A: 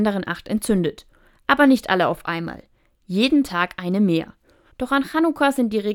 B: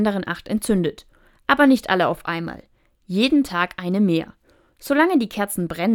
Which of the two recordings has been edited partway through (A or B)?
A